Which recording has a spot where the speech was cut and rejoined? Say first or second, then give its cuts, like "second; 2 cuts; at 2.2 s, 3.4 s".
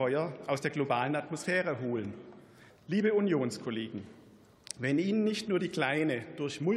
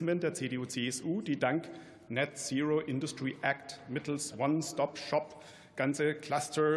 first; 1 cut; at 2.7 s